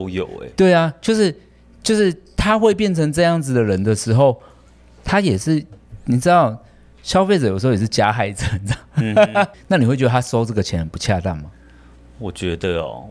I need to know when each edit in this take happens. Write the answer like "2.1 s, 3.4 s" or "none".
9.5 s

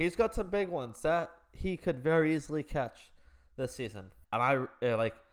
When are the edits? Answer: 4.2 s

